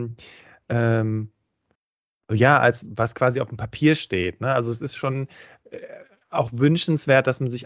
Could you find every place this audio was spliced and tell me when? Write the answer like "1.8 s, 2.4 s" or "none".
none